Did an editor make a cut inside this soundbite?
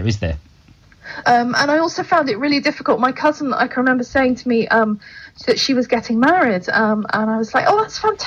yes; 1 cut; at 1.2 s

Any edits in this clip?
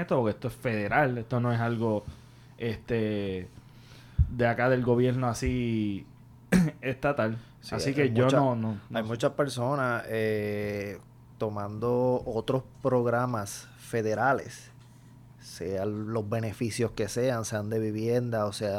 no; 0 cuts

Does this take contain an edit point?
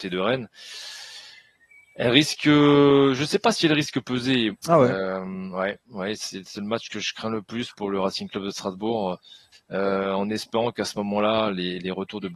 yes; 2 cuts; at 4.5 s, 9.5 s

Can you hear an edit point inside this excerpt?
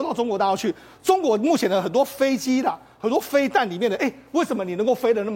no; 0 cuts

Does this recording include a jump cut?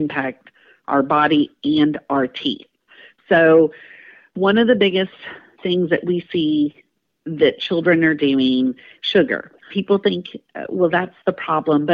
yes; 1 cut; at 9.7 s

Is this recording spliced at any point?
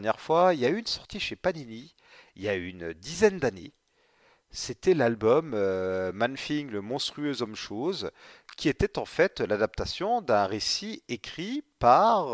no; 0 cuts

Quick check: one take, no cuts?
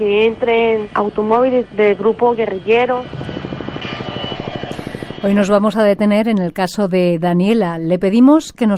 yes; 0 cuts

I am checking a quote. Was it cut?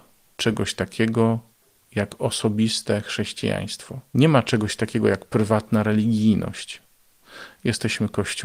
no; 0 cuts

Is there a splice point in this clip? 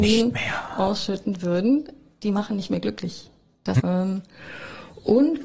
yes; 1 cut; at 3.8 s

